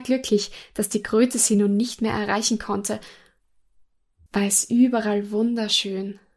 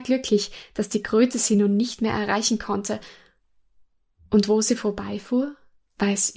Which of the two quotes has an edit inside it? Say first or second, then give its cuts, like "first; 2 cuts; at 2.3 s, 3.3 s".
first; 1 cut; at 4.3 s